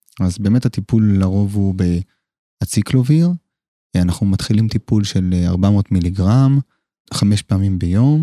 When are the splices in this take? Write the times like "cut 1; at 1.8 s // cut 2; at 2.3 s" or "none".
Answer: cut 1; at 7.1 s